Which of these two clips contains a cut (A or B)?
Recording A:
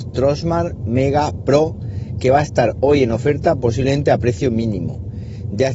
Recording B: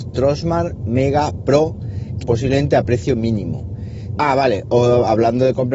B